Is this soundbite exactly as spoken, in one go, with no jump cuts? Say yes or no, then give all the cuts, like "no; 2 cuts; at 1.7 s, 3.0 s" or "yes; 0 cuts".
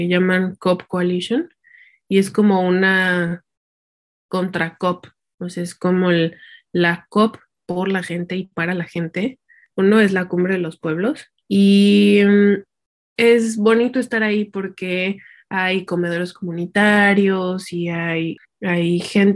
no; 3 cuts; at 7.7 s, 9.7 s, 11.4 s